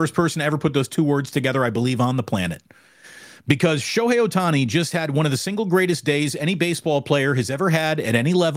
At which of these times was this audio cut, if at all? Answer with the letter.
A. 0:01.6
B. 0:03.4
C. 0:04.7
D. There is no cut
B